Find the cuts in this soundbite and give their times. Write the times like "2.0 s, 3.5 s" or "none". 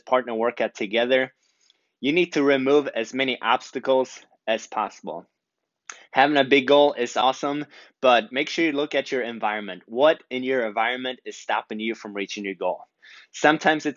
none